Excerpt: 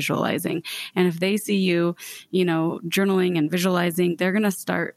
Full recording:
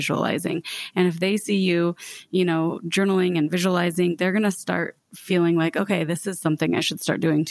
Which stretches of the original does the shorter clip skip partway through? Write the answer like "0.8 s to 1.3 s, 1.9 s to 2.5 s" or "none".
none